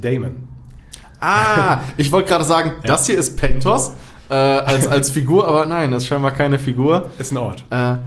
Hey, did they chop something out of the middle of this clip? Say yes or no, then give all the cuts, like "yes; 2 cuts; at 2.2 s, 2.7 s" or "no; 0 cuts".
no; 0 cuts